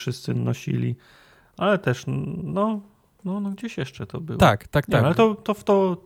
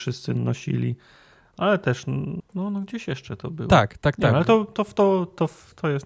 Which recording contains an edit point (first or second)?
second